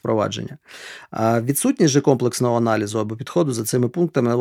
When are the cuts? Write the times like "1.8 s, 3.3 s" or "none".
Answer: none